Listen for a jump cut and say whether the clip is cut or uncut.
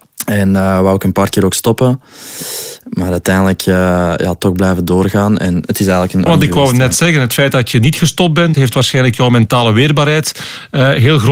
cut